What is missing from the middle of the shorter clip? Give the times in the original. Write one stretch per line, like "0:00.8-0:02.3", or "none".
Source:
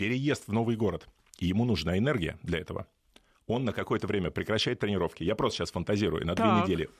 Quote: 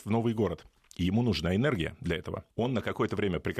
0:02.9-0:03.4